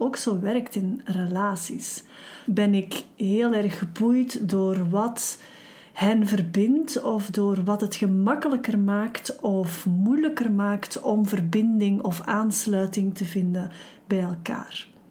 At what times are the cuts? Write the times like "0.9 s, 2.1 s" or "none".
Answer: 2.4 s